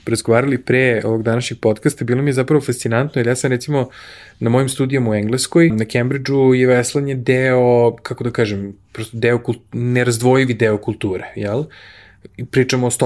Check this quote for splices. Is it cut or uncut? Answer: cut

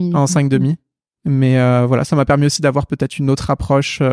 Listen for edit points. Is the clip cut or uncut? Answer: uncut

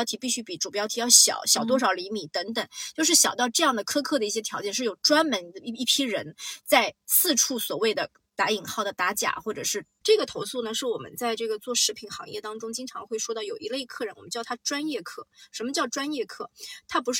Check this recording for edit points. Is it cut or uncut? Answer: cut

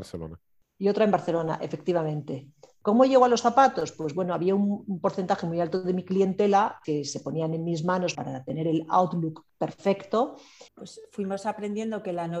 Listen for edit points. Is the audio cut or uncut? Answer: cut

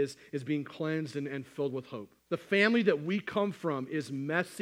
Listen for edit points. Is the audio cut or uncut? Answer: cut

